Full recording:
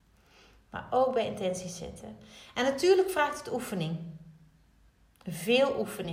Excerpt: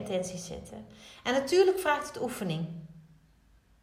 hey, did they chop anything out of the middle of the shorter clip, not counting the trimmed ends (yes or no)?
no